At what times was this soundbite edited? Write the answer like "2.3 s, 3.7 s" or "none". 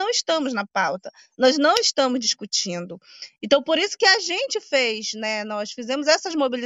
none